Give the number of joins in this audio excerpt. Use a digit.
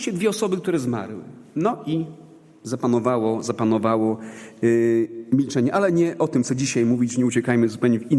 0